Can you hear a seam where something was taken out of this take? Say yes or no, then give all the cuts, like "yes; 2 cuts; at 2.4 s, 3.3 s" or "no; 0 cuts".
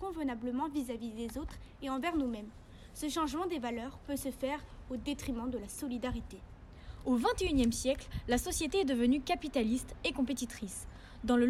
no; 0 cuts